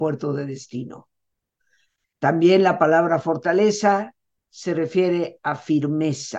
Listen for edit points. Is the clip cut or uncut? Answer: cut